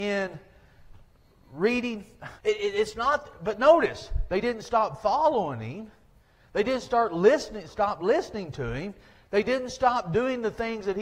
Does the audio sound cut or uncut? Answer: cut